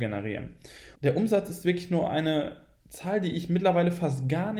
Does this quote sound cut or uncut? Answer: cut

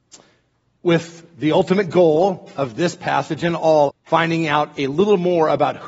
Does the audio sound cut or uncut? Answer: cut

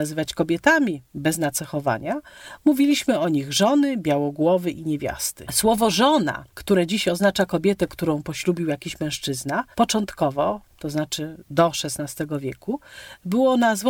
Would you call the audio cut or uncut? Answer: cut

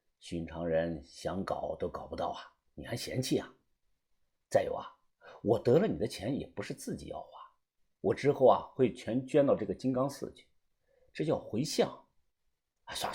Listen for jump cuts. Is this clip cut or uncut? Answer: uncut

